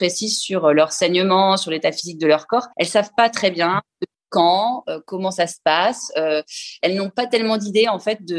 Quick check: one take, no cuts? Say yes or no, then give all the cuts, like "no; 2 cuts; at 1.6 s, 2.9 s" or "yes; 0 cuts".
no; 2 cuts; at 2.7 s, 6.8 s